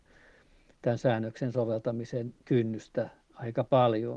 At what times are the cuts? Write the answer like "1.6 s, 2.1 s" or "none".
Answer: 2.4 s